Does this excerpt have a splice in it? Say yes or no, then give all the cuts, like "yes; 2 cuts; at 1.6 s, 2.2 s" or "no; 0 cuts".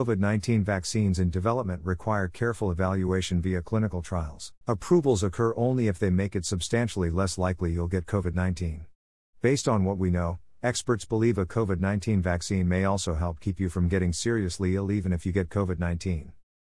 yes; 1 cut; at 4.6 s